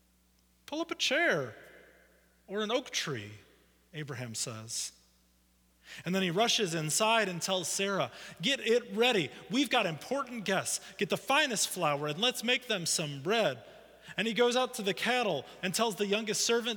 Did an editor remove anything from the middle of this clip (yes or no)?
yes